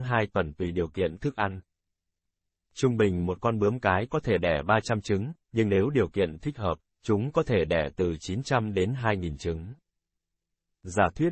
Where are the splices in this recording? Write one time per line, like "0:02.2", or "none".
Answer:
none